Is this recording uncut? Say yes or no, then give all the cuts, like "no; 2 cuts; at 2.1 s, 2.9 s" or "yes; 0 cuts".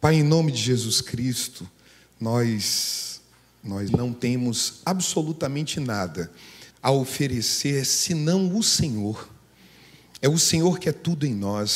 no; 2 cuts; at 3.9 s, 6.7 s